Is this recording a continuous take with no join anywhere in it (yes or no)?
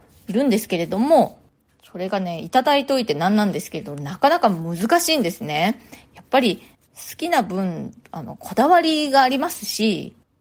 yes